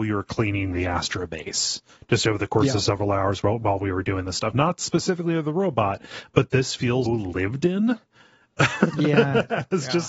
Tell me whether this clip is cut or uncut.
cut